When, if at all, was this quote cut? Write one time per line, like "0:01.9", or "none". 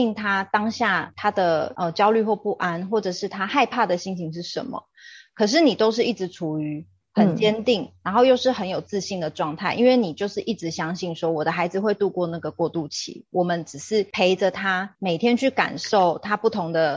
none